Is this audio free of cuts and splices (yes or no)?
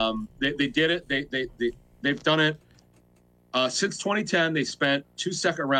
yes